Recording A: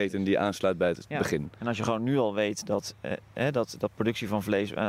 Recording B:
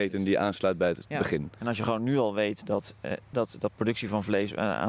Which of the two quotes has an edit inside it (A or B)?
B